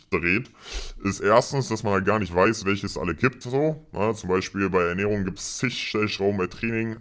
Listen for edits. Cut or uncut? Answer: uncut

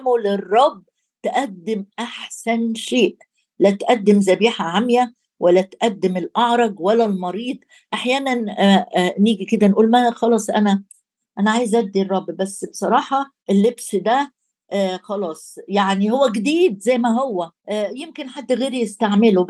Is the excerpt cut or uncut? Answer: cut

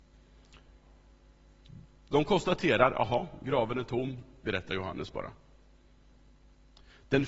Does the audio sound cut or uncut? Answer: cut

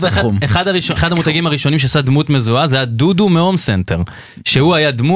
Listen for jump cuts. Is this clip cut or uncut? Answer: cut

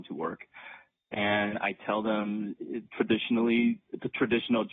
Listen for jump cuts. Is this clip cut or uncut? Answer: cut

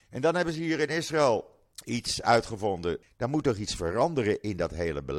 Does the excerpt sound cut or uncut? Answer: cut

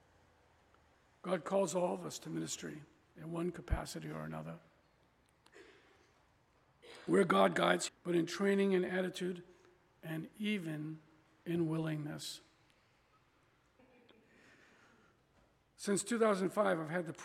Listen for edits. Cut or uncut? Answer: cut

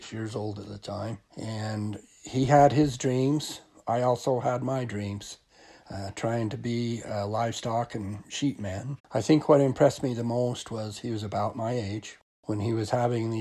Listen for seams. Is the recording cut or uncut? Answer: cut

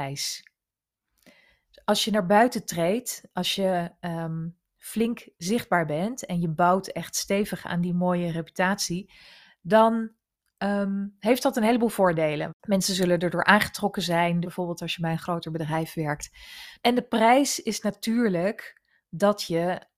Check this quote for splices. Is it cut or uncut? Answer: cut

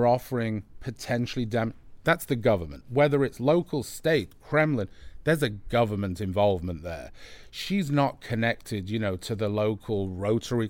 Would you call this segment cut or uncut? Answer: uncut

